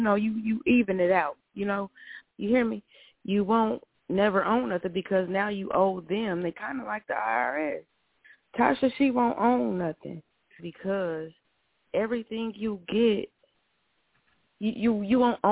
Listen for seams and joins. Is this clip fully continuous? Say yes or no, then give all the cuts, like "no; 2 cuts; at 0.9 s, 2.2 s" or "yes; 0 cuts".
no; 2 cuts; at 2.2 s, 10.6 s